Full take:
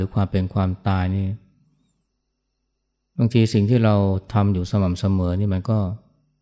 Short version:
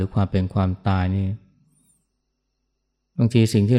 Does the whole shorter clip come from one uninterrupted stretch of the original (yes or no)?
yes